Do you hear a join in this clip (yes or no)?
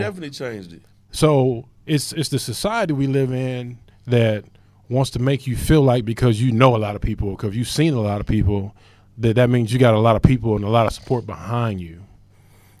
yes